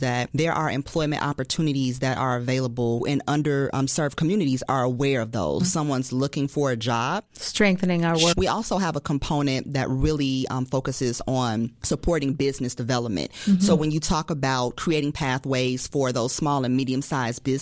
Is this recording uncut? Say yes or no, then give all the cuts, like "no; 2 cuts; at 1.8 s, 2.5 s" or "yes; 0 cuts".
no; 2 cuts; at 5.6 s, 8.3 s